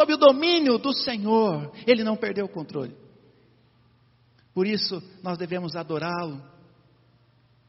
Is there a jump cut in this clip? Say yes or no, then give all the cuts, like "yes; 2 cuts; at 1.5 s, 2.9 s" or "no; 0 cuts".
no; 0 cuts